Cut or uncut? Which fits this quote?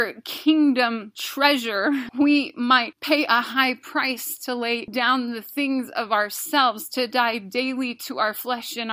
uncut